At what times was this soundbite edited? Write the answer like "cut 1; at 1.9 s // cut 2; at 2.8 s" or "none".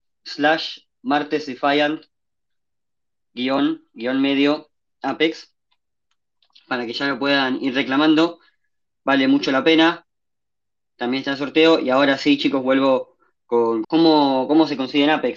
cut 1; at 13.8 s